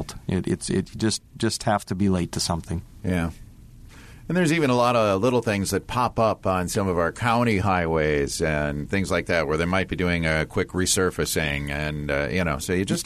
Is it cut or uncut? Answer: uncut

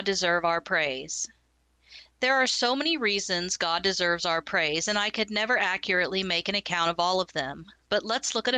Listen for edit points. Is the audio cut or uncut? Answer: uncut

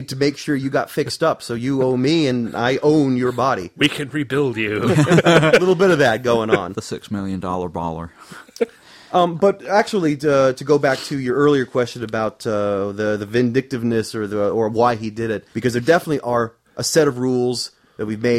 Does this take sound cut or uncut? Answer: cut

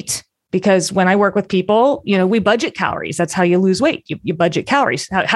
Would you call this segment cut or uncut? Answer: uncut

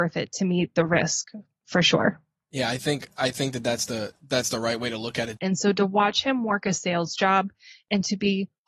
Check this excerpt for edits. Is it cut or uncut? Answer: cut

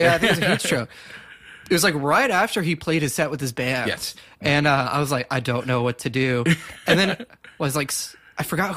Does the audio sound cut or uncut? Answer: uncut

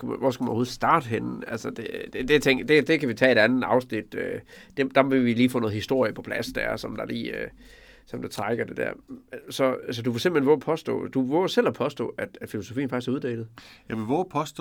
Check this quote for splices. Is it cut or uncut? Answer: uncut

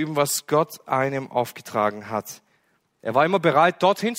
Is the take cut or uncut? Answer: uncut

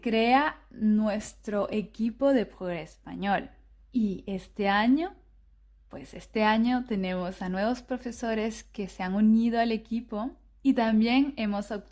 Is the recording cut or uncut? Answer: cut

